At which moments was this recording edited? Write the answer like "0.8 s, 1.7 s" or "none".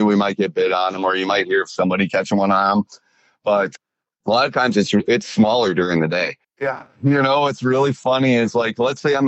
6.4 s